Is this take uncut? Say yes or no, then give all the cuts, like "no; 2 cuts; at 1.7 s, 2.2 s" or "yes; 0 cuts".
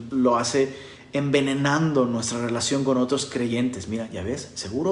yes; 0 cuts